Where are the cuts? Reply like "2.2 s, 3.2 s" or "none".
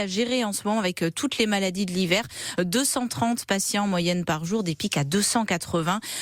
none